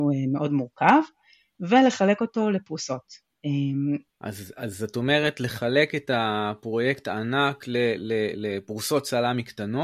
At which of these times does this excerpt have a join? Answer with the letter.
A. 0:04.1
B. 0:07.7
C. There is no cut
A